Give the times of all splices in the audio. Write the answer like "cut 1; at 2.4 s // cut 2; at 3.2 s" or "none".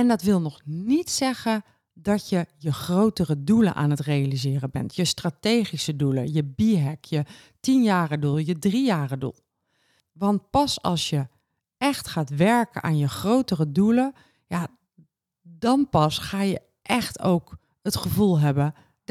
cut 1; at 8.3 s // cut 2; at 10.0 s